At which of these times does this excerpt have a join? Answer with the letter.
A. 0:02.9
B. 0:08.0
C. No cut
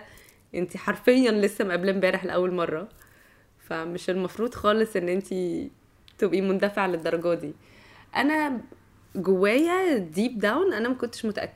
C